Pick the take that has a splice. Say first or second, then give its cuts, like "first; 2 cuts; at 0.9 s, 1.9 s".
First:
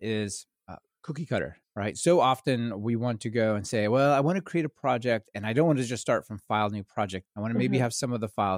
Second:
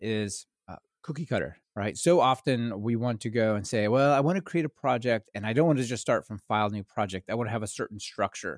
first; 1 cut; at 7.2 s